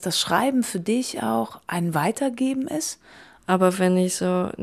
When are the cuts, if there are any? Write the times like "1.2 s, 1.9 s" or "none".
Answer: 3.4 s